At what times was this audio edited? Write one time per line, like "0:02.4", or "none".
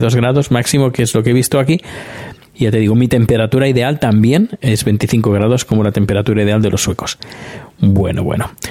0:02.5